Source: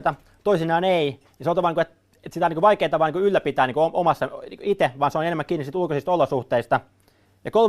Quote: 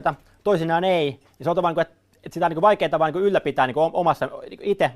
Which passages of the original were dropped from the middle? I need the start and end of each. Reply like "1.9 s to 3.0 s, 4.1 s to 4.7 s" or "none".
none